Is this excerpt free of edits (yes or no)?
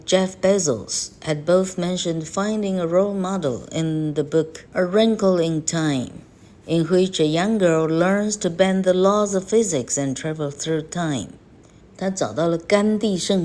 no